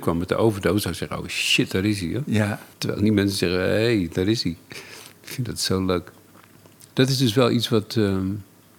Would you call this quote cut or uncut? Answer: cut